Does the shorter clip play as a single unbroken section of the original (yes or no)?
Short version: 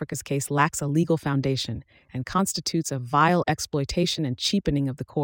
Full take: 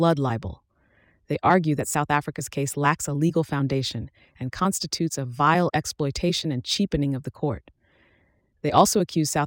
yes